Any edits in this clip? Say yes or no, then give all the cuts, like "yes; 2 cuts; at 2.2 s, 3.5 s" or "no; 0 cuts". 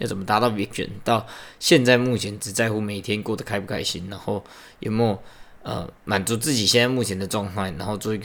yes; 1 cut; at 6.0 s